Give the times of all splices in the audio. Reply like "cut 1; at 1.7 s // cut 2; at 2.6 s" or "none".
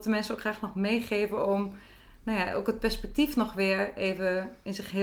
none